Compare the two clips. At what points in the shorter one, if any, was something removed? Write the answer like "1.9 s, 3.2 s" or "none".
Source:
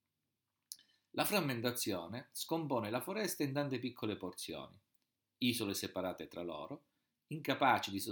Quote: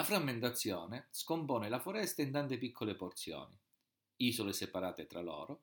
none

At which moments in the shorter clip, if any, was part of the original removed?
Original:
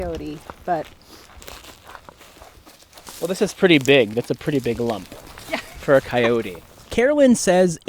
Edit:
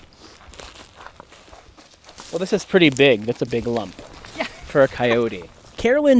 3.5 s

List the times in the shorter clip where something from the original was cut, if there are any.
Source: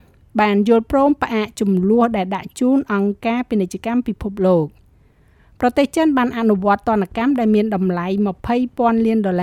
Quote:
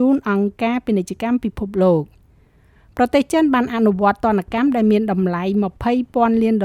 none

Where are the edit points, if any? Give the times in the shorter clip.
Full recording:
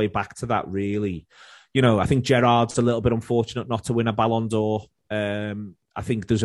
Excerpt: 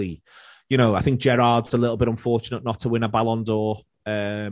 none

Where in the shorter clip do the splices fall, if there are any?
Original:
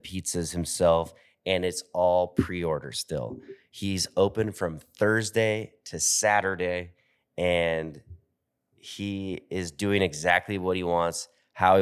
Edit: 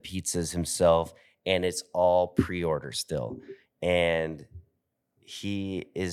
3.6 s

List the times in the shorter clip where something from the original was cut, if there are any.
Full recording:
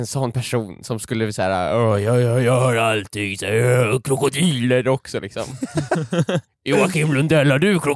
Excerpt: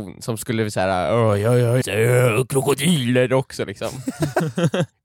1.8 s

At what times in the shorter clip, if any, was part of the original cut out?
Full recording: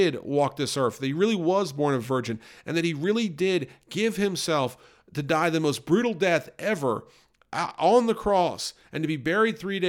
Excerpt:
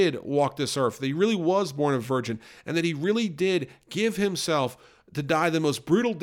none

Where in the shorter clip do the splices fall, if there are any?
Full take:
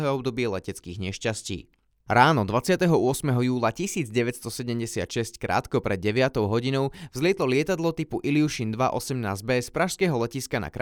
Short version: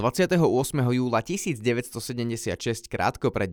none

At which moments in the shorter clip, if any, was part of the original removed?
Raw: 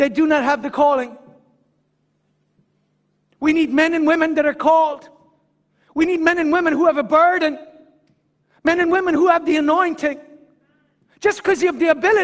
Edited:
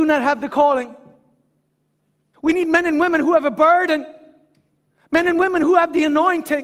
2.3 s

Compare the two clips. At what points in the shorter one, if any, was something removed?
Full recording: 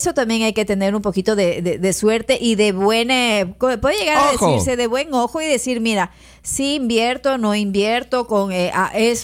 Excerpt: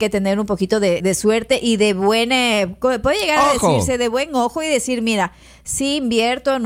1.0 s

